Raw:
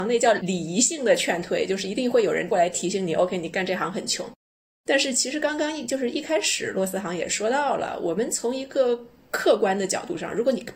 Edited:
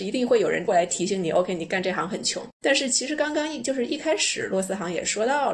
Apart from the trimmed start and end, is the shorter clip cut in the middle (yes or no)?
yes